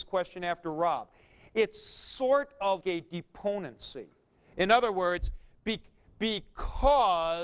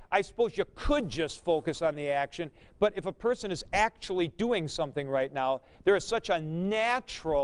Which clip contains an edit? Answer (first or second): first